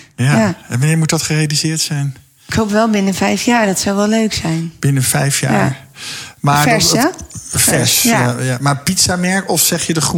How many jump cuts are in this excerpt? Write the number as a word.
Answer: zero